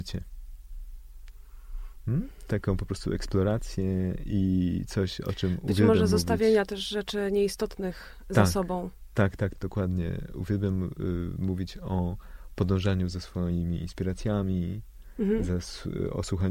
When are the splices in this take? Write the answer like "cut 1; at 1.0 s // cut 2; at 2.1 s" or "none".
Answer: cut 1; at 9.5 s